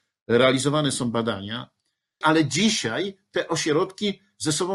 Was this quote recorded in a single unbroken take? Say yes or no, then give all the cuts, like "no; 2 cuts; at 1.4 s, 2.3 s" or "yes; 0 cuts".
no; 1 cut; at 2.2 s